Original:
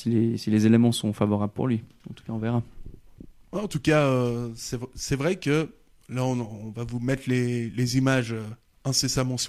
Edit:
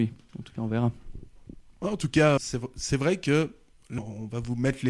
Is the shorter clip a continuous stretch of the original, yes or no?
no